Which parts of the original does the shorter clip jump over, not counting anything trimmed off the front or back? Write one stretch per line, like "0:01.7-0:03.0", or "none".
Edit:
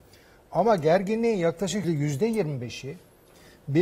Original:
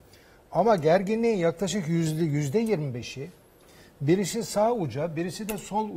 0:01.8-0:02.2